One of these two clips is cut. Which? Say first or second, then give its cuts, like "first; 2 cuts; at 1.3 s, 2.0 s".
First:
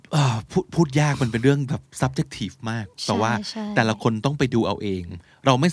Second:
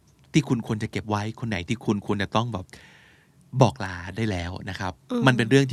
first; 1 cut; at 1.9 s